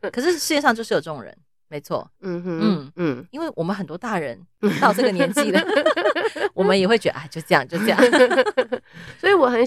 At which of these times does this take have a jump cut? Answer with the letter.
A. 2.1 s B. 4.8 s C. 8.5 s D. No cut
A